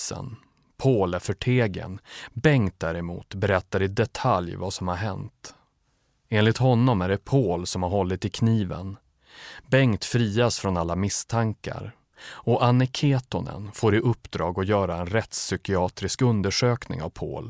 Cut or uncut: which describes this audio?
uncut